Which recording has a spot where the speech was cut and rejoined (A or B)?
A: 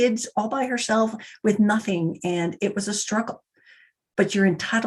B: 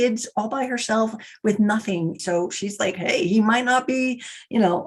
B